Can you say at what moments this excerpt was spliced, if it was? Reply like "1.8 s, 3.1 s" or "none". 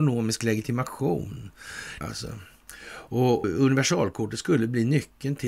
2.0 s, 3.4 s